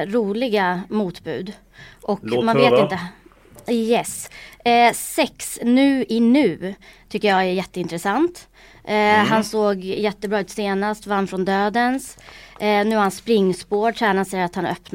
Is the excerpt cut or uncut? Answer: uncut